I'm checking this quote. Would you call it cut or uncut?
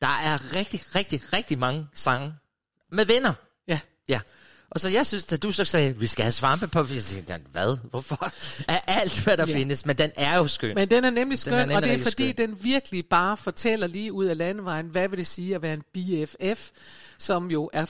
uncut